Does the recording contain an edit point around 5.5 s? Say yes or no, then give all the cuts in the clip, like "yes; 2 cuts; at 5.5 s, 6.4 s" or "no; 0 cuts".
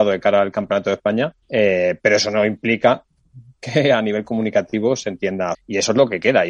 yes; 2 cuts; at 1.4 s, 5.5 s